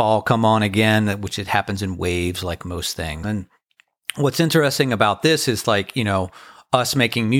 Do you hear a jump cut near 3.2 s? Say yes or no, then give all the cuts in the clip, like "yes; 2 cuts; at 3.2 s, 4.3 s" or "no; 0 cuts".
yes; 1 cut; at 3.2 s